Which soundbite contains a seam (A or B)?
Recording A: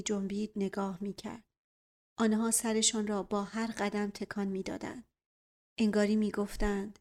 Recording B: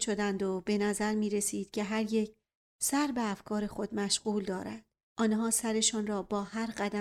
B